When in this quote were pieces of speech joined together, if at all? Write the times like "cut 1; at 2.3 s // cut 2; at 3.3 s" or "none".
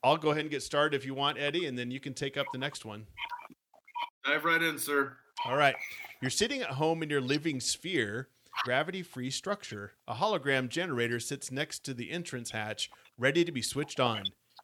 cut 1; at 8.6 s